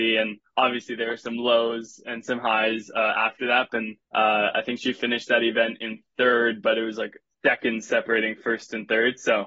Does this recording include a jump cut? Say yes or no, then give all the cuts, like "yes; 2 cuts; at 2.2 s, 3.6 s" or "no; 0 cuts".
yes; 1 cut; at 3.7 s